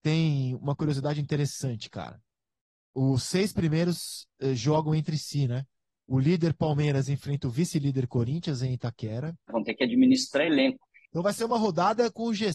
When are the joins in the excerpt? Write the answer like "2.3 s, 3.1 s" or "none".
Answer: 9.5 s, 11.0 s